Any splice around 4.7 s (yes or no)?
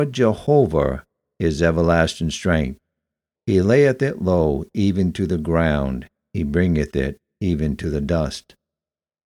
no